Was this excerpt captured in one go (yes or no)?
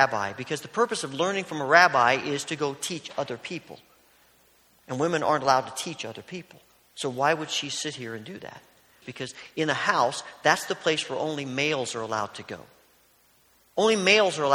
no